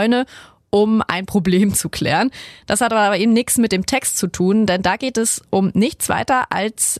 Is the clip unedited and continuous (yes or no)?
yes